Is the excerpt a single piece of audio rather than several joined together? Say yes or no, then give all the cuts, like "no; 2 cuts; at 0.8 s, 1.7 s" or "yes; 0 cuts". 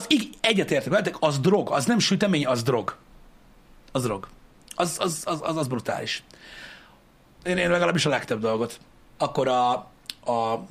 no; 2 cuts; at 7.3 s, 9.2 s